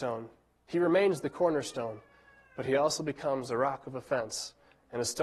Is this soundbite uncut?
yes; 0 cuts

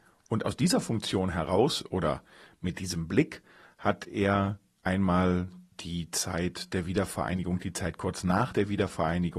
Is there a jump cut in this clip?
no; 0 cuts

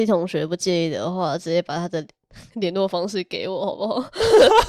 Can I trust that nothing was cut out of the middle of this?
yes; 0 cuts

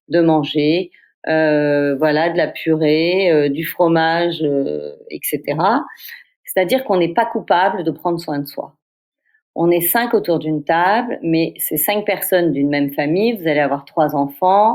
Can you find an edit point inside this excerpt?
yes; 1 cut; at 6.2 s

